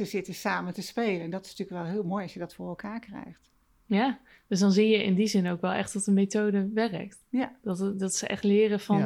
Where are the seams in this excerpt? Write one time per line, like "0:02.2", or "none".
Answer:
none